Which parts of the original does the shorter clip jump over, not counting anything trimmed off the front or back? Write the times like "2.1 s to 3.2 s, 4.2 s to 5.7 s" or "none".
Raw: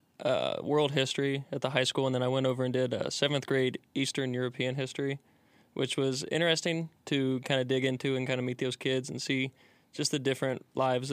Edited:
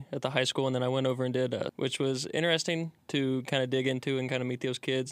3.1 s to 5.7 s